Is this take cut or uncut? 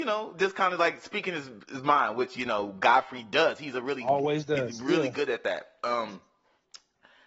uncut